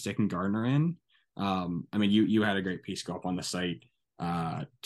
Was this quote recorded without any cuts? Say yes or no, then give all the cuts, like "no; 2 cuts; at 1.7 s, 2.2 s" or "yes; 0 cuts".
yes; 0 cuts